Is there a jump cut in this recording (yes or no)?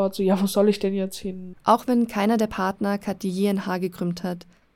yes